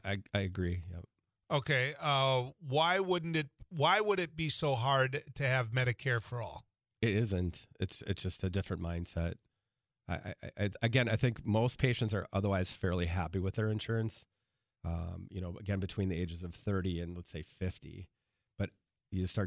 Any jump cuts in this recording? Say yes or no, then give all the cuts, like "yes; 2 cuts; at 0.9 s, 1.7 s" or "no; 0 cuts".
no; 0 cuts